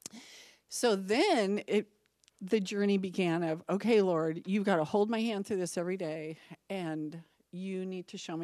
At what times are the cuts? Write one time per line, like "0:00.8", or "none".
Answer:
none